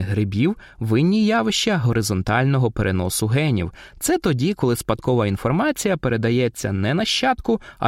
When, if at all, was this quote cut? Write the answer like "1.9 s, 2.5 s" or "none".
none